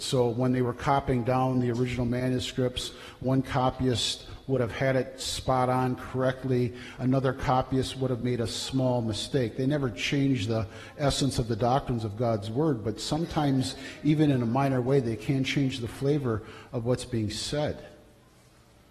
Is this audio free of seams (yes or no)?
yes